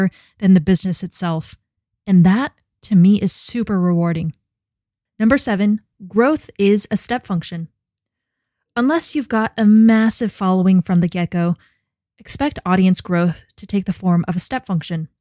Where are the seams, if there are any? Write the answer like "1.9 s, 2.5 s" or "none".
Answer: none